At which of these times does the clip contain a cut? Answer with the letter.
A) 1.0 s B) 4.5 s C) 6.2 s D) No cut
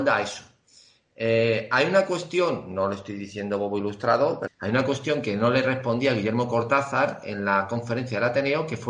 B